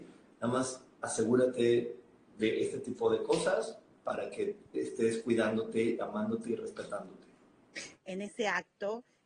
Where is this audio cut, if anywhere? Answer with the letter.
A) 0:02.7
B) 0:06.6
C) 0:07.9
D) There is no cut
C